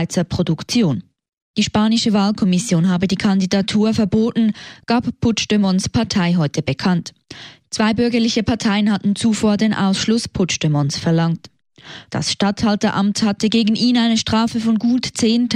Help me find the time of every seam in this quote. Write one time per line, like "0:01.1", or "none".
0:01.5
0:07.6
0:12.1